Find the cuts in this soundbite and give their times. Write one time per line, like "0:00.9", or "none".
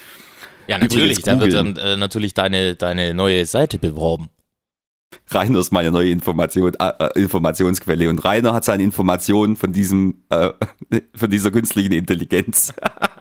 none